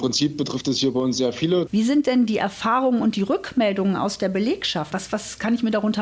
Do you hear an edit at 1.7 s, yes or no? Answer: yes